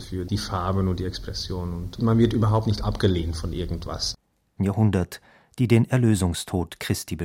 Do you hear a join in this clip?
yes; 1 cut; at 4.6 s

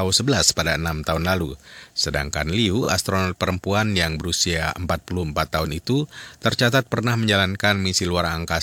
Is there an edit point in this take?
no; 0 cuts

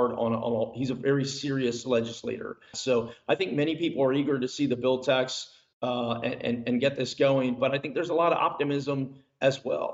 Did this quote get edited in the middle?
yes; 1 cut; at 2.7 s

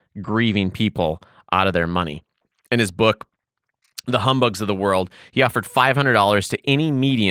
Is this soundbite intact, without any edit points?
yes; 0 cuts

